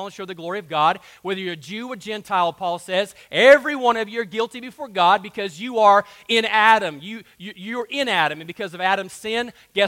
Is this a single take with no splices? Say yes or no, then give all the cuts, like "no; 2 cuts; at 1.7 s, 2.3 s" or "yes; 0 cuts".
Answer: yes; 0 cuts